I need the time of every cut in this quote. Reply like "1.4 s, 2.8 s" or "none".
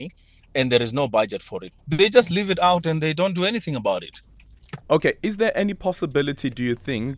1.7 s, 4.8 s

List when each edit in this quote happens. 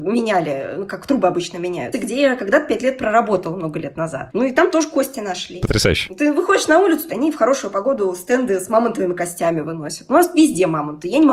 1.9 s, 7.1 s

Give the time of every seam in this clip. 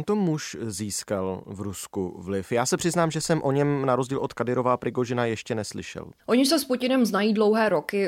6.2 s

